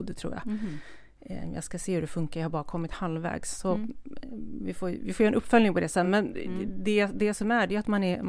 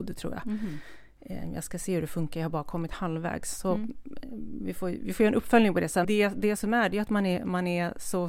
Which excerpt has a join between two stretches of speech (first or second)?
second